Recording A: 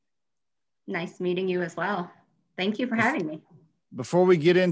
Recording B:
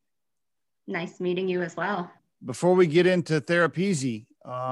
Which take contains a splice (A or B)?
B